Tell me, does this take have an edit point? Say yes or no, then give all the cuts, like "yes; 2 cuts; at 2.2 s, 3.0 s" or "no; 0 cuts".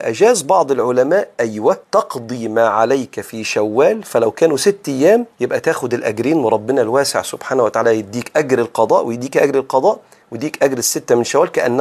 yes; 2 cuts; at 1.8 s, 5.3 s